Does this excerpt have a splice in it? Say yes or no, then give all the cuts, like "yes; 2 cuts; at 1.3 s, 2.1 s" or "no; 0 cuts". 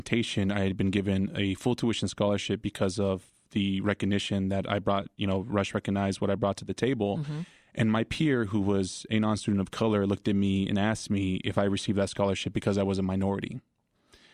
no; 0 cuts